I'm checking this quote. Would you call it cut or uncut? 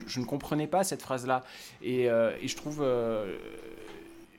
uncut